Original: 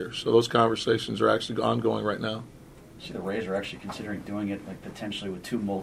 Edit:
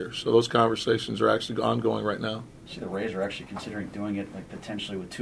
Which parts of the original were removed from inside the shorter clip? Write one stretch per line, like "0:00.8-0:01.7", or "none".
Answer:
0:02.6-0:02.9

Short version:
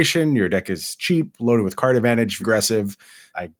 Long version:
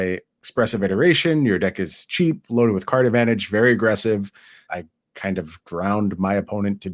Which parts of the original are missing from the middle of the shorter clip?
0:03.5-0:03.7

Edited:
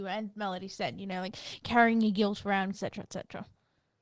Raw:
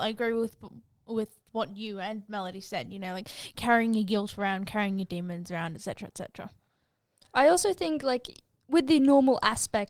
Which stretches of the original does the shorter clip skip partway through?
0:04.7-0:05.8

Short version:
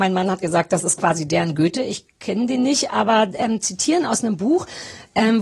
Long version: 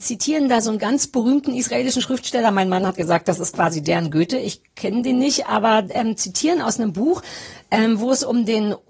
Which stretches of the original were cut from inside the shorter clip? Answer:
none

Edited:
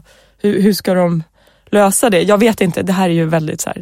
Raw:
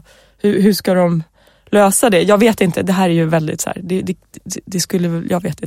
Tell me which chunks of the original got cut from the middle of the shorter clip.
none

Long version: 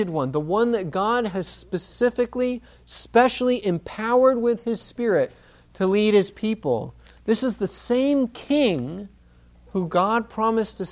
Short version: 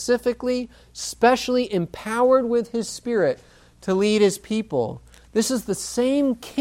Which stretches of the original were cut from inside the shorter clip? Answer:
none

